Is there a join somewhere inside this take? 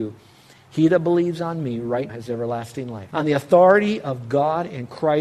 yes; 2 cuts; at 2.1 s, 3.1 s

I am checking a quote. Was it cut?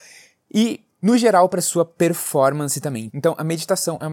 yes; 1 cut; at 3.1 s

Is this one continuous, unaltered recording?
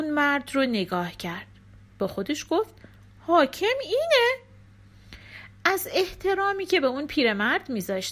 yes; 0 cuts

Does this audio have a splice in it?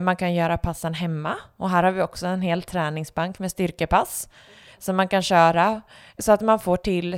yes; 1 cut; at 6.2 s

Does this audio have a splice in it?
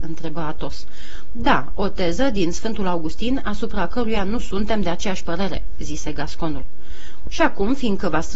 yes; 1 cut; at 7.3 s

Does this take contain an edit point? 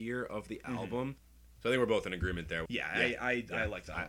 yes; 2 cuts; at 1.6 s, 2.7 s

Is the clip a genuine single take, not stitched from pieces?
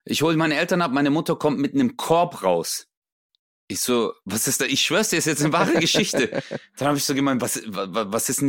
yes; 0 cuts

